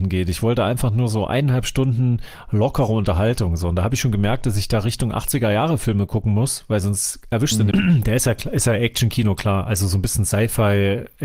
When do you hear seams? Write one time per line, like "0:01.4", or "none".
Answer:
0:07.7